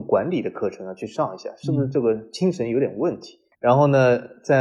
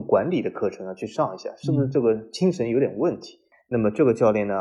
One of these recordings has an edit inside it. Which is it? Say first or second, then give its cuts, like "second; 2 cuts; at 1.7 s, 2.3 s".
first; 1 cut; at 3.5 s